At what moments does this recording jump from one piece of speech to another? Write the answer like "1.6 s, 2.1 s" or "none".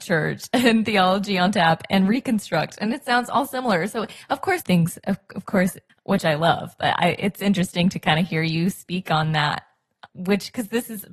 4.6 s, 5.9 s, 10.1 s